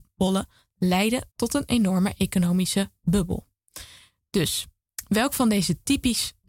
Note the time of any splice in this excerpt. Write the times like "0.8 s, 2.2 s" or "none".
1.3 s